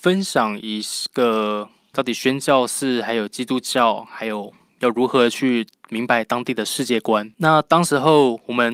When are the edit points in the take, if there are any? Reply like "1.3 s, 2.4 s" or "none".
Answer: 1.9 s